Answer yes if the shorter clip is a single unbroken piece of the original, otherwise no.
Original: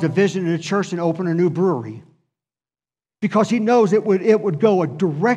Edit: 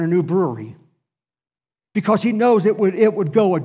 yes